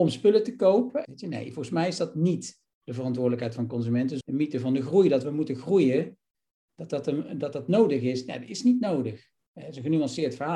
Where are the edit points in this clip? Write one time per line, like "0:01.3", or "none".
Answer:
0:01.0
0:04.2